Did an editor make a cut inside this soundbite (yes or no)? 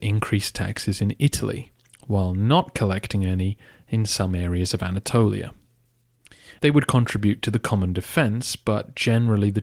yes